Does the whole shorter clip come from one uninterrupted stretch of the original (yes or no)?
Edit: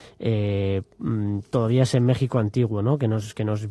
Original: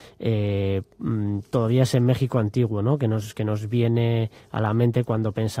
yes